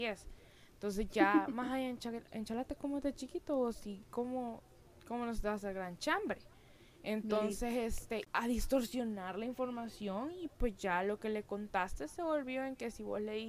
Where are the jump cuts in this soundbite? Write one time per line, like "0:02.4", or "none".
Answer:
0:08.2